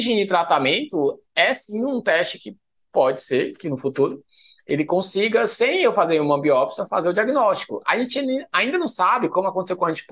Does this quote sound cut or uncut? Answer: uncut